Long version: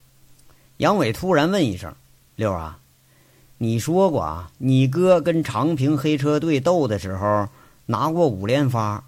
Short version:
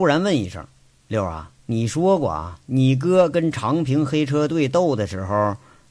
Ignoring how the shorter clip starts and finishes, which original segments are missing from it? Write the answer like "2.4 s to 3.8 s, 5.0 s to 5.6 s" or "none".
2.9 s to 3.5 s